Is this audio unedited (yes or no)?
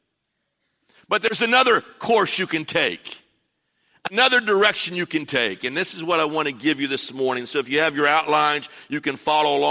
yes